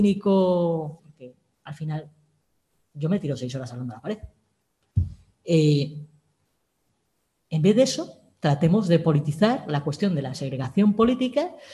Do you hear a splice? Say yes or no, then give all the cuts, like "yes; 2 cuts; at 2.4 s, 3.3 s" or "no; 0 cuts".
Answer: yes; 1 cut; at 1.0 s